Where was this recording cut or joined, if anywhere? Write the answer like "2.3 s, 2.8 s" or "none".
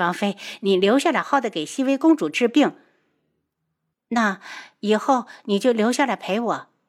1.2 s, 3.9 s